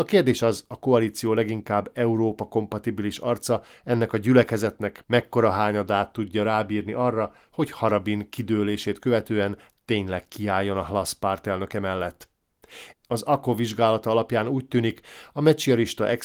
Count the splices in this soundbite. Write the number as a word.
one